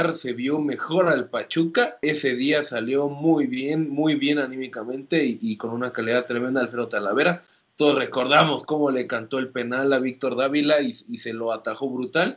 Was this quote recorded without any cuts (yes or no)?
yes